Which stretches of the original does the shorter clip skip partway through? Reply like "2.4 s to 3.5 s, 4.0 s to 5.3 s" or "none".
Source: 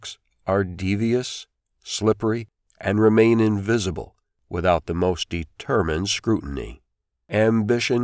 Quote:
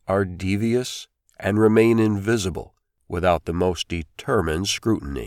1.6 s to 2.7 s